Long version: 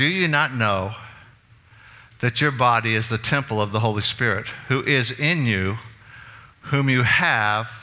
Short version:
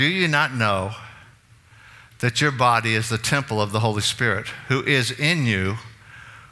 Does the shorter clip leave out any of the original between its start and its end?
no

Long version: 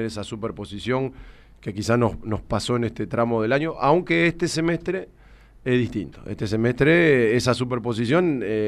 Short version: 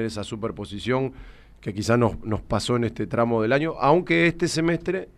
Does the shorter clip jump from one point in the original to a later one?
no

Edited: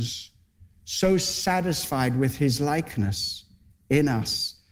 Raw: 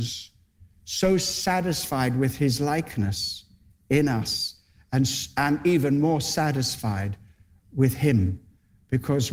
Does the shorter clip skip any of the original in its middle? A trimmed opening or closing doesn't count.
no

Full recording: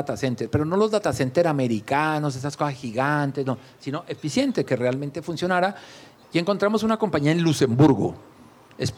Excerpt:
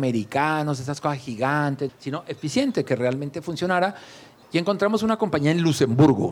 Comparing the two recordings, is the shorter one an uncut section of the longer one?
no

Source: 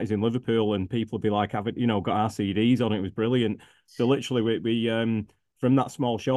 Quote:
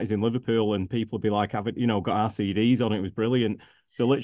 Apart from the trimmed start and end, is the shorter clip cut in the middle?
no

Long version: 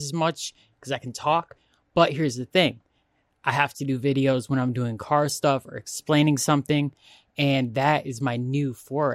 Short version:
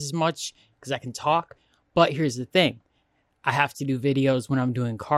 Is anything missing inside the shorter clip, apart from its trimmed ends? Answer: no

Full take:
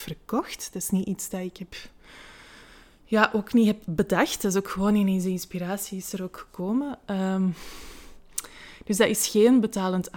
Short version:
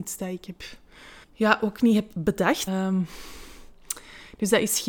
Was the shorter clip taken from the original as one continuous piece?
no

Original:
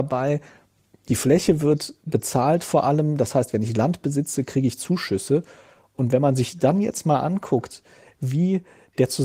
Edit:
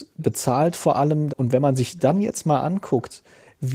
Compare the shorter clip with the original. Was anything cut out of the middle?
yes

